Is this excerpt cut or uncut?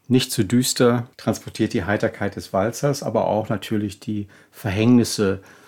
cut